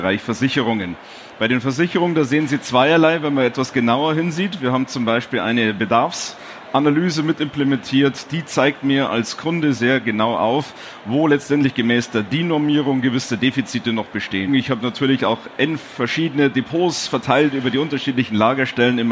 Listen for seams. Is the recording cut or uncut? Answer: cut